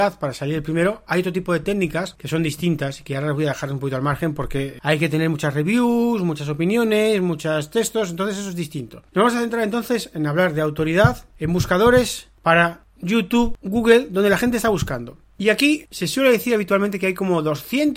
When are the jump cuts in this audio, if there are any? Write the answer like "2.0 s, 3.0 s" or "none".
none